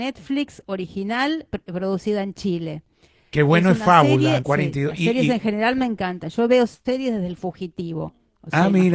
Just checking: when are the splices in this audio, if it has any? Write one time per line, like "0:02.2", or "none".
0:04.4